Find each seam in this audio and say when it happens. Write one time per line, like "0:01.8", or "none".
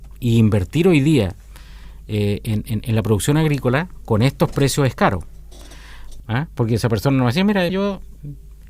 0:06.2
0:07.7